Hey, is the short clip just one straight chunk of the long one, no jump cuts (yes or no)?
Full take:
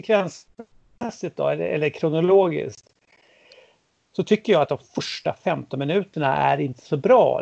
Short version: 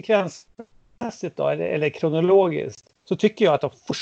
no